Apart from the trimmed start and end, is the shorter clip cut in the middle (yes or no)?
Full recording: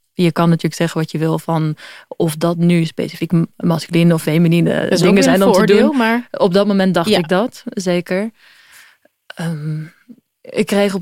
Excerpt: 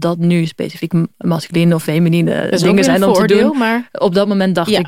no